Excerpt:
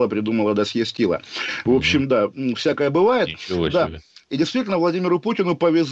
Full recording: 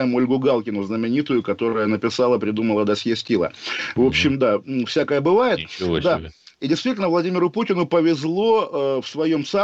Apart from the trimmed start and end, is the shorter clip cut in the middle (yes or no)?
no